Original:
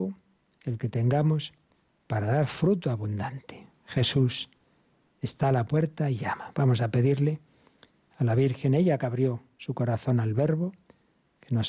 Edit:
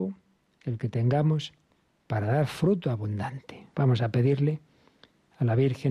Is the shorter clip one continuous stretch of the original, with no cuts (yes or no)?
no